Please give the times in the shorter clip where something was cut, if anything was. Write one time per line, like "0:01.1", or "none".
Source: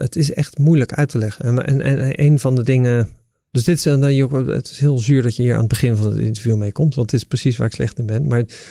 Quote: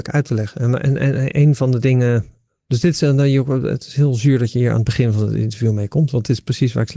none